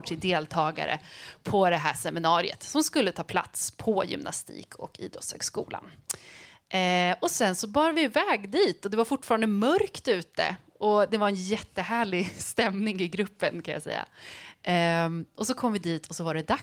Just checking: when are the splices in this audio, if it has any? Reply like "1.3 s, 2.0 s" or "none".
none